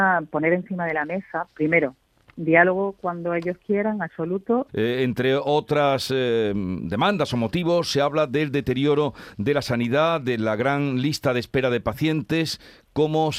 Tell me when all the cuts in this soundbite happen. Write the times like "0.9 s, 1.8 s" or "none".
4.7 s